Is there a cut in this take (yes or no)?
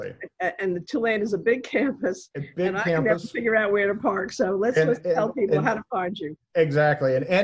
no